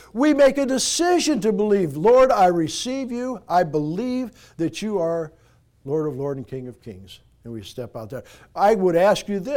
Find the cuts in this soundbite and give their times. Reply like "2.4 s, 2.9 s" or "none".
none

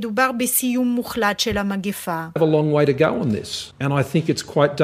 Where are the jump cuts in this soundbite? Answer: 2.4 s

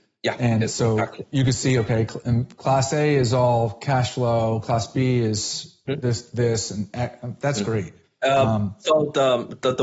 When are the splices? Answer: none

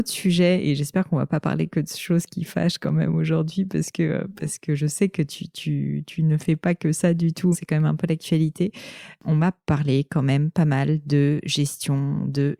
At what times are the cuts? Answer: 7.5 s

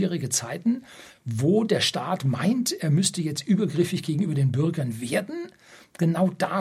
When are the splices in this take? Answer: none

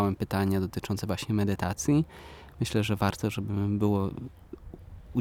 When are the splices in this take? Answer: none

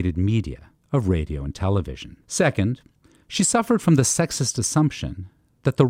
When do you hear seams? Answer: 2.2 s

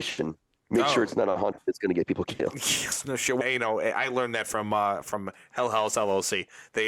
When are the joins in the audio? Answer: 3.4 s

